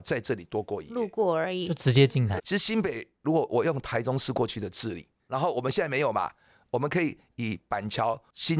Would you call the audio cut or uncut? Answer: cut